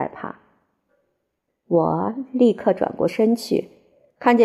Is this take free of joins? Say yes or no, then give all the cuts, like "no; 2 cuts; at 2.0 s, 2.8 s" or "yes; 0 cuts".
no; 1 cut; at 1.5 s